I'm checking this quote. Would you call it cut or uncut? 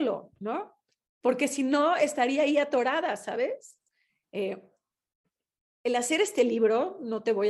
cut